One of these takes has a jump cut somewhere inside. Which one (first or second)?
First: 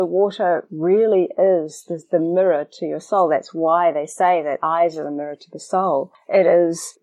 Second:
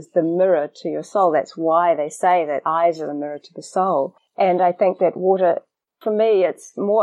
second